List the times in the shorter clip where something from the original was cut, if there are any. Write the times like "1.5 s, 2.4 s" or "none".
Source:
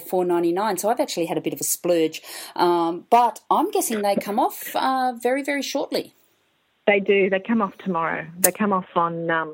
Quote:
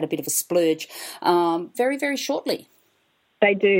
1.7 s